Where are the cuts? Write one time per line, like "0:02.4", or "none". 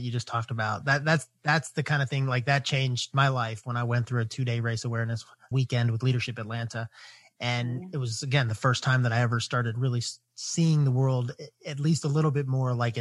0:05.5